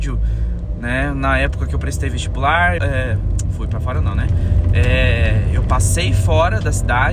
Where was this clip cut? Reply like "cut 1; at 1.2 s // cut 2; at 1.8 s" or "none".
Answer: cut 1; at 2.8 s